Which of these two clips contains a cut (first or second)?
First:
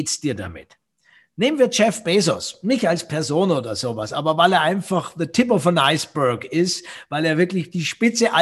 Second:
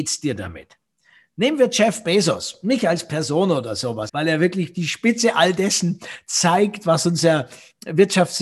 second